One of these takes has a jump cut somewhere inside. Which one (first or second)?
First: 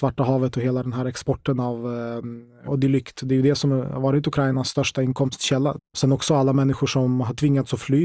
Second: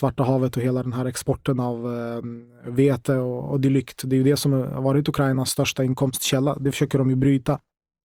first